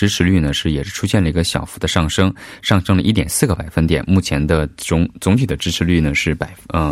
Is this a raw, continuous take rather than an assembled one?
yes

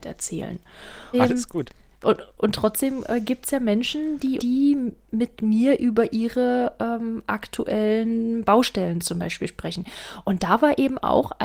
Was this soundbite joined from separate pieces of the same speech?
yes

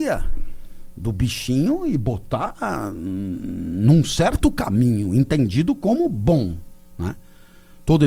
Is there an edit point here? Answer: no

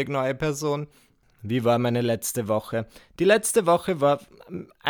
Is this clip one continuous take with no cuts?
yes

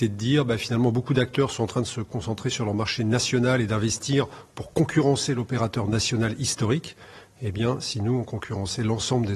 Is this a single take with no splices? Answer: yes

